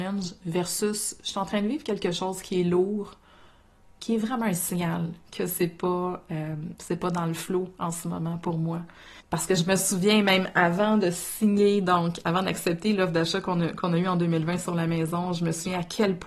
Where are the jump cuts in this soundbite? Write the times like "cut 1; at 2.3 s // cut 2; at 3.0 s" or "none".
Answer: cut 1; at 9.2 s